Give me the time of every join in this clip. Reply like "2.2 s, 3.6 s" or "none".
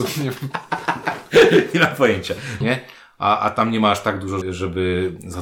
2.6 s, 4.4 s